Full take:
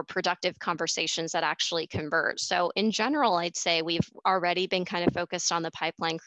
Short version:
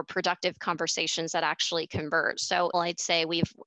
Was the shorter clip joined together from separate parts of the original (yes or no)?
yes